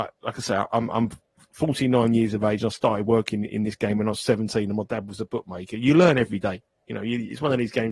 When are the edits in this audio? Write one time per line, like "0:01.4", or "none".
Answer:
none